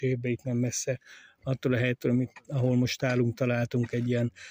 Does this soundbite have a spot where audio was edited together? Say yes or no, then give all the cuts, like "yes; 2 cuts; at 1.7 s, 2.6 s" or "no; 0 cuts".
no; 0 cuts